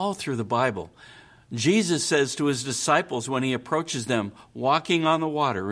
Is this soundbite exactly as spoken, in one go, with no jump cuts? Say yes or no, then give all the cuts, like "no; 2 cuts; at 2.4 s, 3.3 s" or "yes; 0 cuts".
yes; 0 cuts